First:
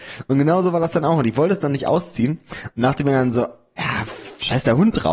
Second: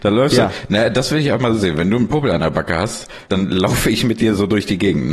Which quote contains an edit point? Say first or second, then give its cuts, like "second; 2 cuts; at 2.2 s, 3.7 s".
second; 1 cut; at 3.3 s